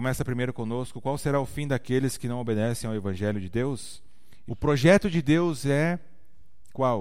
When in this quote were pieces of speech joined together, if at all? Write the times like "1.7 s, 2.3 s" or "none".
4.5 s